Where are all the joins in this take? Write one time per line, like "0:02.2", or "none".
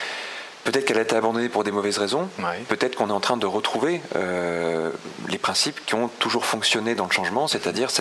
none